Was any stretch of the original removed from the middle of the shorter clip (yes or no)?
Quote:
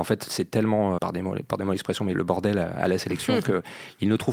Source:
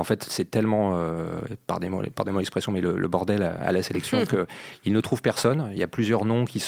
yes